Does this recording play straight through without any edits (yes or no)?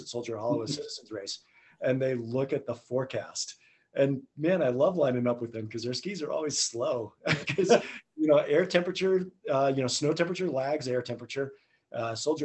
yes